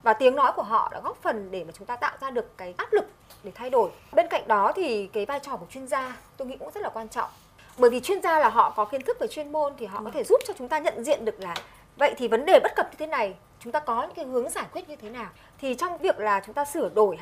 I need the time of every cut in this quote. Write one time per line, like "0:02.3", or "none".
0:06.3